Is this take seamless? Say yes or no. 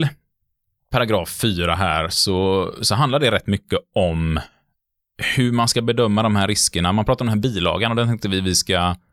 yes